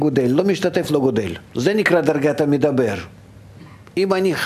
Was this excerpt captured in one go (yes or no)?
no